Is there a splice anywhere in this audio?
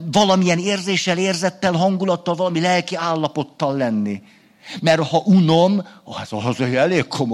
no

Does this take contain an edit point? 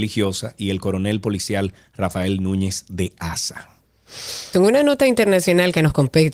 yes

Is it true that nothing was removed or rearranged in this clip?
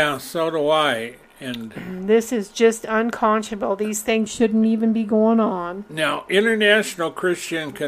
yes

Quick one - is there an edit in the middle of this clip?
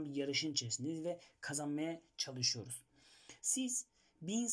no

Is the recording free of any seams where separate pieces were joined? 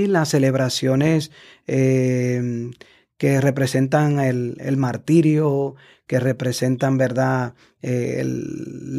yes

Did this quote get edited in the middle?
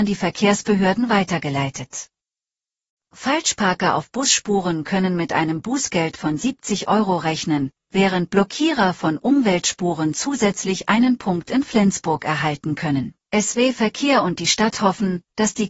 yes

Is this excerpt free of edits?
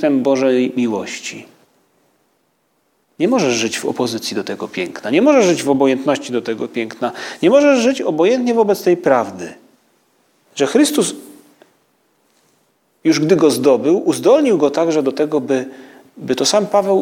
no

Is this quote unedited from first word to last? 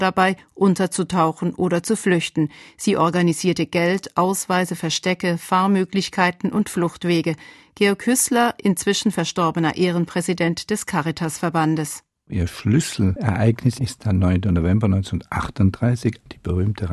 yes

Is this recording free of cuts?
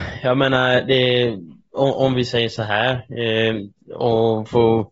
yes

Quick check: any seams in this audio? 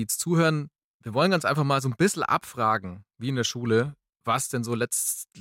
no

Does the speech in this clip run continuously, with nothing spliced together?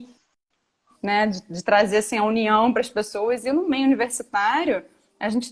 yes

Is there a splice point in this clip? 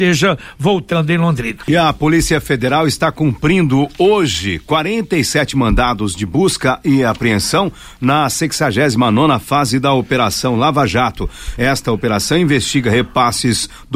no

